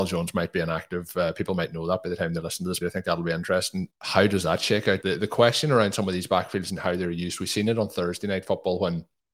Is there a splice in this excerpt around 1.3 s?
no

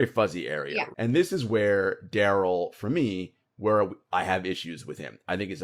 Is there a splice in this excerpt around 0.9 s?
yes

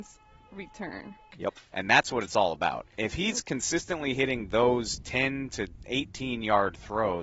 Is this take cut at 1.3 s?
yes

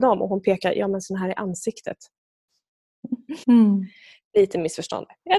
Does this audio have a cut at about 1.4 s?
no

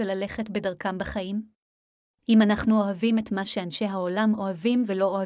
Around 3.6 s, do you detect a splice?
no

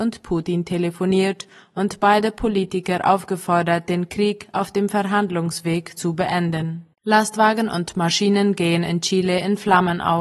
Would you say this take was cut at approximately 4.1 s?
no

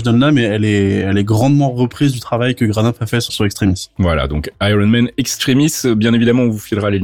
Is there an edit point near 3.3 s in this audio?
yes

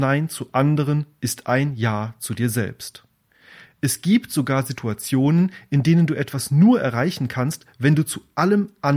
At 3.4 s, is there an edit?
no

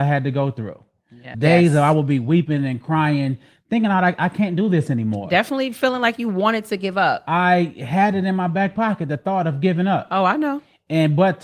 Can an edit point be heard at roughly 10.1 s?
no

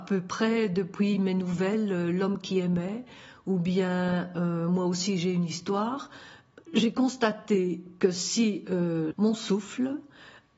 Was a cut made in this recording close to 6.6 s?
yes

